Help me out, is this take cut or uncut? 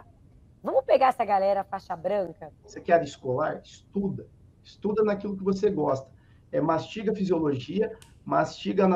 cut